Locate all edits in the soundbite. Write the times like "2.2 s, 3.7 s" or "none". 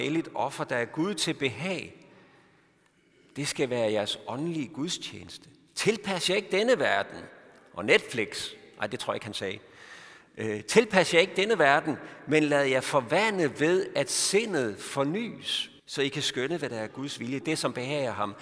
15.8 s, 17.4 s